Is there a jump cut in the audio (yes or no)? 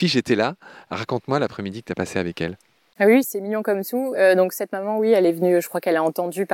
no